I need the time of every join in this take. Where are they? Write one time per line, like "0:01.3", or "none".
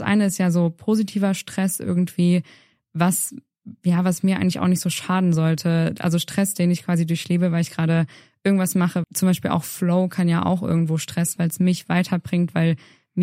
0:09.0
0:11.4